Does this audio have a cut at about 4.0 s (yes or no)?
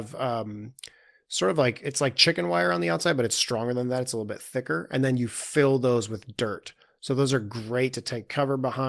no